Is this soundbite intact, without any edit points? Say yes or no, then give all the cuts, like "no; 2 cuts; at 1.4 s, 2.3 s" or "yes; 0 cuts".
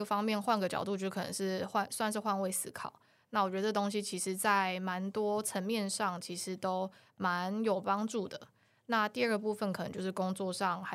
yes; 0 cuts